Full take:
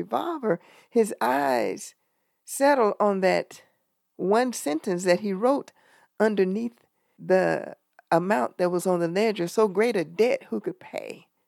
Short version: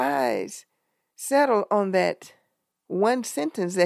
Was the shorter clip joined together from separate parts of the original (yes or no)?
no